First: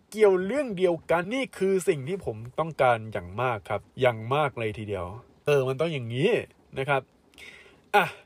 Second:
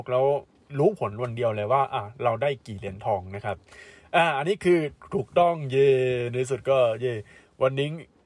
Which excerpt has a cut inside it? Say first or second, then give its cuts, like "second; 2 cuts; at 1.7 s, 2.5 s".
first; 3 cuts; at 1.2 s, 3.9 s, 5.5 s